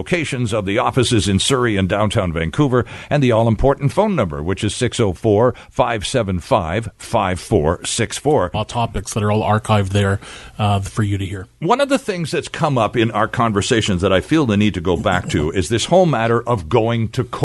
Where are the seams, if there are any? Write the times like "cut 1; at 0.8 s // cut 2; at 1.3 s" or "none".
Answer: cut 1; at 8.5 s